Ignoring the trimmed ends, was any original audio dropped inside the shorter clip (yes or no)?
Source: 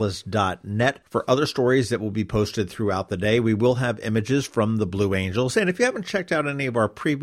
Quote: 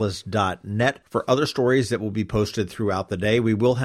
no